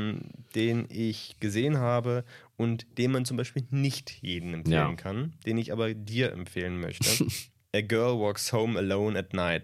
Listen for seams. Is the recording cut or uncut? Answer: uncut